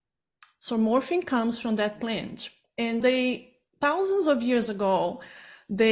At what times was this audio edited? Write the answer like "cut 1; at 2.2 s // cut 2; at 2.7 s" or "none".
cut 1; at 3.0 s